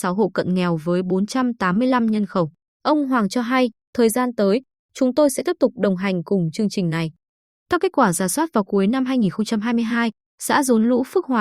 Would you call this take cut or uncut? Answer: cut